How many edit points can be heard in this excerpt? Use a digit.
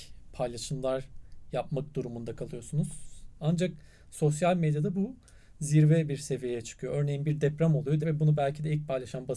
2